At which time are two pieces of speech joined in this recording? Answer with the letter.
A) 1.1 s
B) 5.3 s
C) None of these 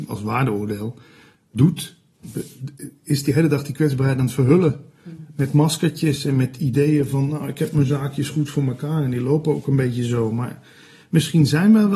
C